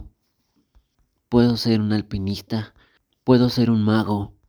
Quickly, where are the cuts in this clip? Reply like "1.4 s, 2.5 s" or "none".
none